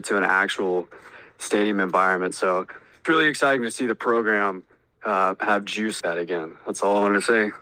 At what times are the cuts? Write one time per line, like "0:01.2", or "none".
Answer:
0:03.0
0:06.0